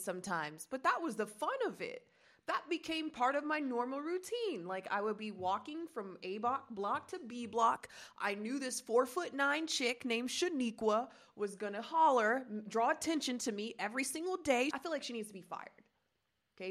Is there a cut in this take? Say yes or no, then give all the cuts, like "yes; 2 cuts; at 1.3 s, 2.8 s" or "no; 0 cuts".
yes; 1 cut; at 14.7 s